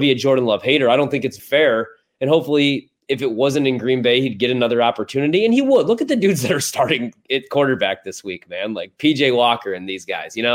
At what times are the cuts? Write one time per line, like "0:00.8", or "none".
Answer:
0:01.4